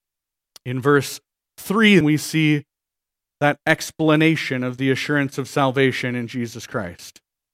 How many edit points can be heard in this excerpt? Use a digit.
1